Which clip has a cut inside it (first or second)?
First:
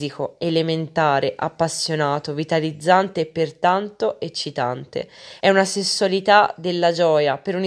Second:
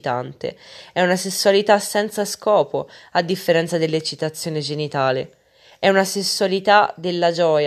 first